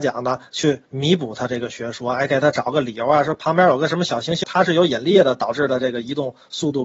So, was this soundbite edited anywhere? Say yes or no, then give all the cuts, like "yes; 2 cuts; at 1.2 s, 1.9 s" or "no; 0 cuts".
yes; 1 cut; at 4.4 s